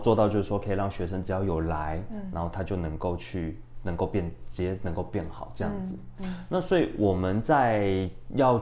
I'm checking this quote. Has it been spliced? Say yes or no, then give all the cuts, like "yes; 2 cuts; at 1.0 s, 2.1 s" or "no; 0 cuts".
no; 0 cuts